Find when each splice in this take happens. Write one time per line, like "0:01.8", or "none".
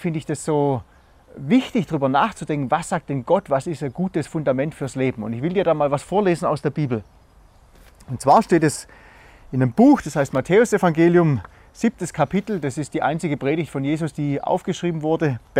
none